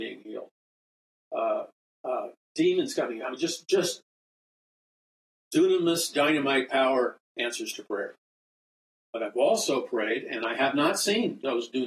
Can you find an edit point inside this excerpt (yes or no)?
no